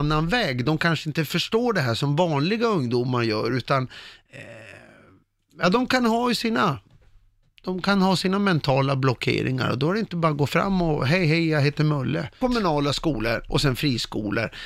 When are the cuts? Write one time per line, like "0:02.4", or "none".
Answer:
0:12.4